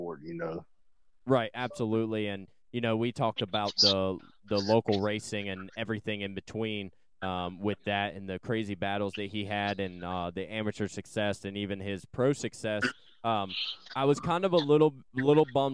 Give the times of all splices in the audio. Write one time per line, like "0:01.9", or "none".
none